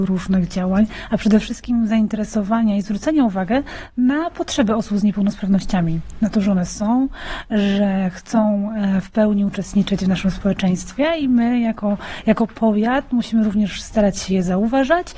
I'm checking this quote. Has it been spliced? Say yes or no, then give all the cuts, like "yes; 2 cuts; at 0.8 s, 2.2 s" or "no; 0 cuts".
no; 0 cuts